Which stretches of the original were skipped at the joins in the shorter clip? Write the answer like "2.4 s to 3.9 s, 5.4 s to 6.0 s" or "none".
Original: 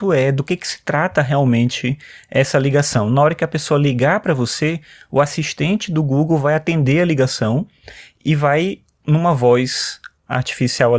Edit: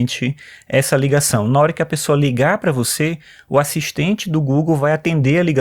none